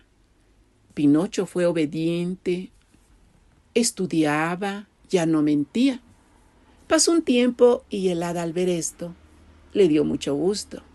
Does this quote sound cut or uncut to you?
uncut